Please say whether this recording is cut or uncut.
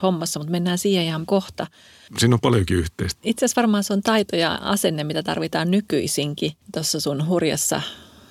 cut